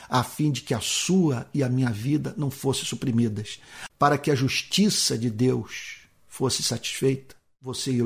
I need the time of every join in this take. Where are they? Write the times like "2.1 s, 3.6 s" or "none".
3.9 s